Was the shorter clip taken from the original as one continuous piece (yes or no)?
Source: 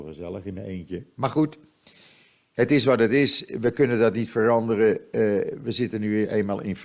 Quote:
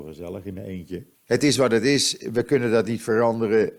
no